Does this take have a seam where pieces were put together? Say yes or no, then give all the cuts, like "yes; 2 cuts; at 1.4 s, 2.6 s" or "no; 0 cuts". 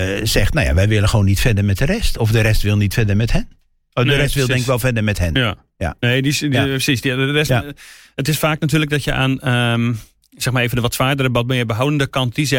no; 0 cuts